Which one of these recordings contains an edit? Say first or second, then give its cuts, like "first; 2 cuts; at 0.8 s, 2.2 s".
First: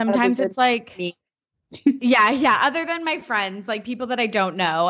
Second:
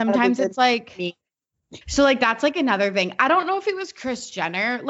second; 1 cut; at 1.8 s